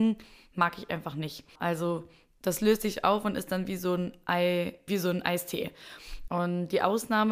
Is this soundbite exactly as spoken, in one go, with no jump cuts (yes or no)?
no